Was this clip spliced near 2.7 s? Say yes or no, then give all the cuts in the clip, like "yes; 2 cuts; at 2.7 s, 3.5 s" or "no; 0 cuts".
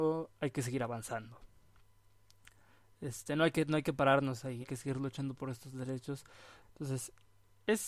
no; 2 cuts; at 4.6 s, 6.6 s